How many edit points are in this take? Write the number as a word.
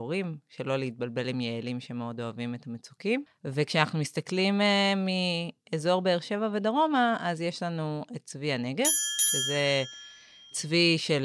one